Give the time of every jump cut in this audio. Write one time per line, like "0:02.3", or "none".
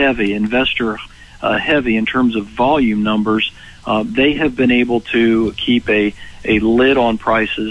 none